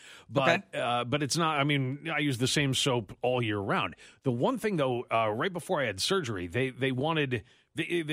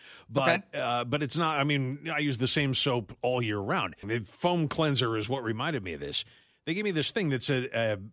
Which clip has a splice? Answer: second; 1 cut; at 4.0 s

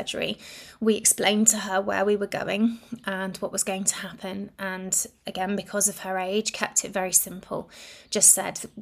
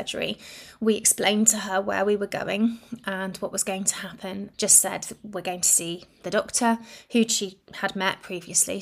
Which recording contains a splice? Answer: second; 1 cut; at 4.5 s

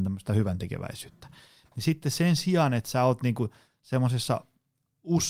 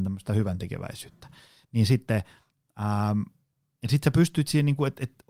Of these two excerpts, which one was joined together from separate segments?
first; 1 cut; at 1.6 s

